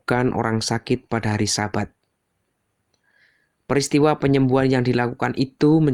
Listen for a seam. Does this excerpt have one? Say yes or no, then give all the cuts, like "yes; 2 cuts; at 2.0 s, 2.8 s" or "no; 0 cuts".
no; 0 cuts